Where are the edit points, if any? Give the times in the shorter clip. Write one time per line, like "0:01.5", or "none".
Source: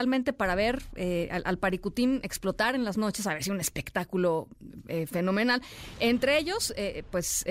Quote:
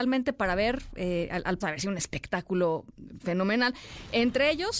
0:01.6
0:03.2